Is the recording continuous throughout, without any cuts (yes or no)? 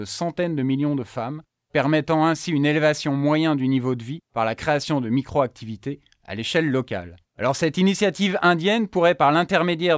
no